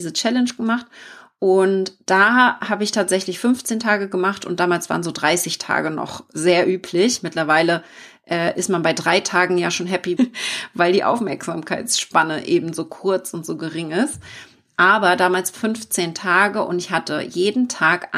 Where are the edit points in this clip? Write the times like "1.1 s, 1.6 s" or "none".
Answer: 10.2 s